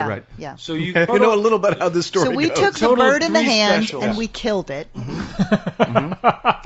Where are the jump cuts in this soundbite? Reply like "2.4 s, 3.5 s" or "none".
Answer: 1.1 s